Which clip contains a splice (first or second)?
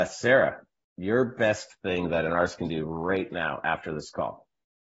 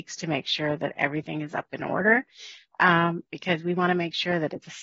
second